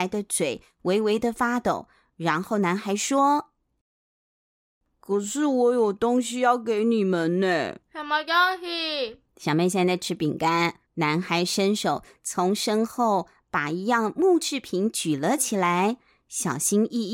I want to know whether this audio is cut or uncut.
cut